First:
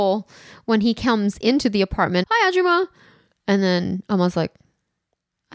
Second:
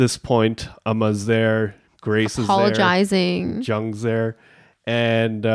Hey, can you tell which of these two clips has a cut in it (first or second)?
first